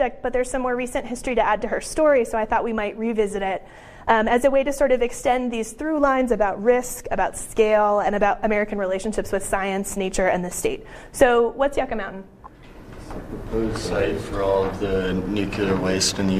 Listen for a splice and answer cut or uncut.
uncut